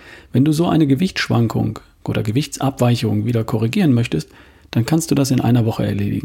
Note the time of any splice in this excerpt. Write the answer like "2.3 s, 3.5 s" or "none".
none